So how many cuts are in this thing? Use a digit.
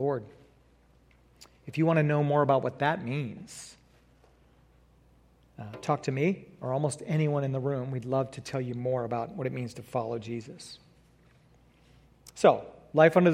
0